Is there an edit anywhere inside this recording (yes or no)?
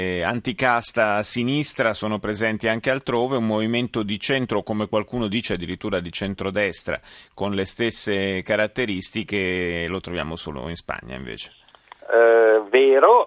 no